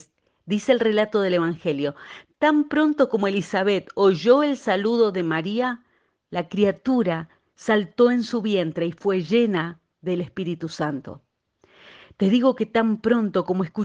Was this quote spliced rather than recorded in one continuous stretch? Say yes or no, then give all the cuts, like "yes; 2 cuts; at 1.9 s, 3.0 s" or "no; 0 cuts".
no; 0 cuts